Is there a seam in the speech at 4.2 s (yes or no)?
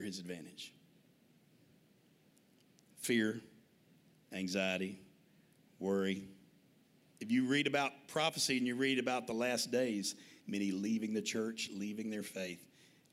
no